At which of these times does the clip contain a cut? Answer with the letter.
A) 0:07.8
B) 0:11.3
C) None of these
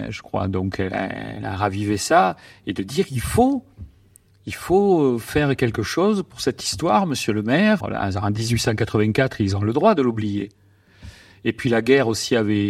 A